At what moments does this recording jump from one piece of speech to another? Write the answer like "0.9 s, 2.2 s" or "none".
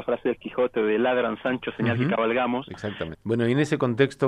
3.1 s